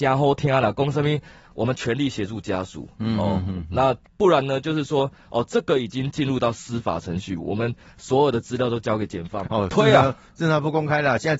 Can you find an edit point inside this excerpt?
yes; 1 cut; at 9.4 s

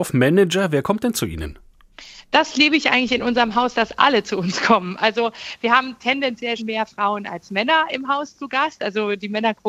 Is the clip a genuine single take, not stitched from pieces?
no; 1 cut; at 6.6 s

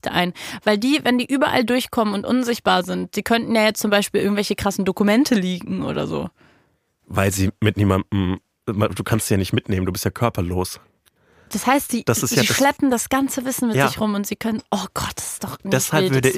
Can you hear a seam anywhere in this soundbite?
no; 0 cuts

